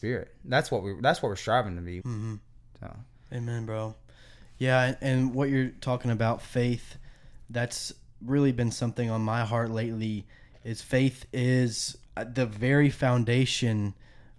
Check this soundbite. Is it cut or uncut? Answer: cut